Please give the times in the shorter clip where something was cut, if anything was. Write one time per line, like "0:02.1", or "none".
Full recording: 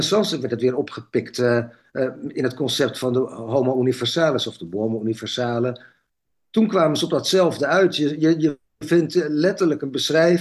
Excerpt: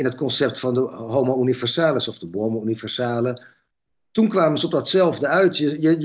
none

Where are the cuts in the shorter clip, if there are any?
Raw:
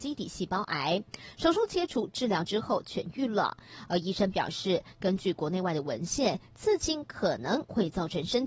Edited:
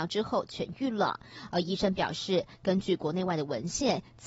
none

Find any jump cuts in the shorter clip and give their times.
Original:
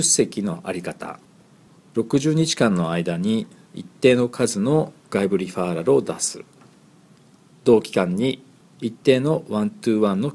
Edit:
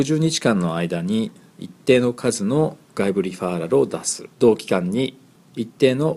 0:04.3

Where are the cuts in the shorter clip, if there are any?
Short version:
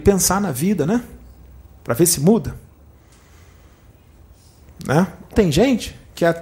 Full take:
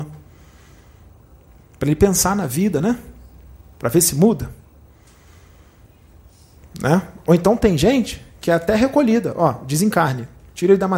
0:05.3

